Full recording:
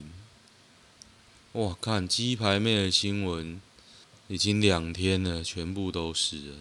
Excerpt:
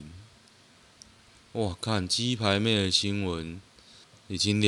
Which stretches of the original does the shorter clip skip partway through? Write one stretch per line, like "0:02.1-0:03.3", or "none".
none